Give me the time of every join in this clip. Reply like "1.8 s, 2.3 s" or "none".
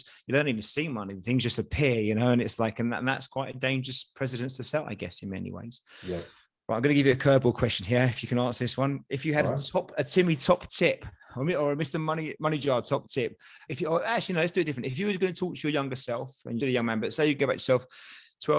13.7 s, 16.6 s

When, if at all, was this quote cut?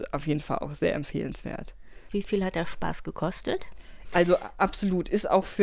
2.1 s, 4.0 s

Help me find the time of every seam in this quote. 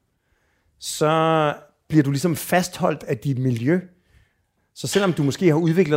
4.6 s

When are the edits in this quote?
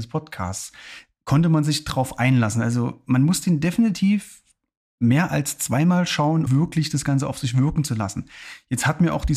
6.5 s

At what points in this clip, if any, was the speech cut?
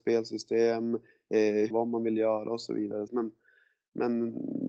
1.7 s, 3.1 s

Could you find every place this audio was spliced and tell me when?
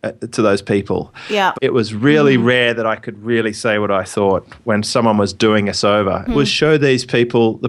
1.5 s, 6.3 s

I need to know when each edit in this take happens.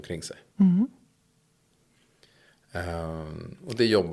none

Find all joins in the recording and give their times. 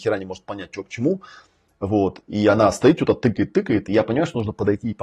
none

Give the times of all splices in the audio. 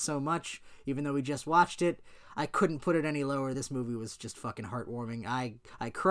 none

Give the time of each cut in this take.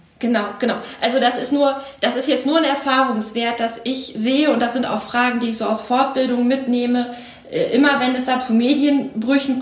none

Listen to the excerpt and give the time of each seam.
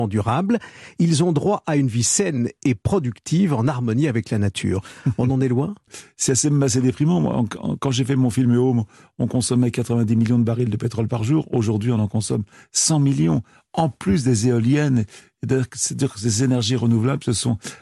none

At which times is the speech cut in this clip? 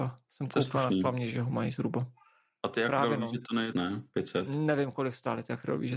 3.7 s

